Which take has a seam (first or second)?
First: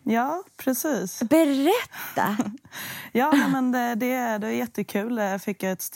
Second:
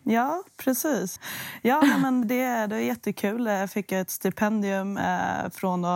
second